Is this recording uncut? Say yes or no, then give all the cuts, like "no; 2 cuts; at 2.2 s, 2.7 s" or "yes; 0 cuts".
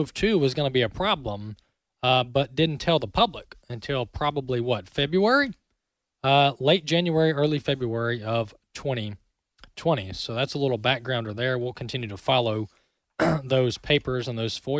yes; 0 cuts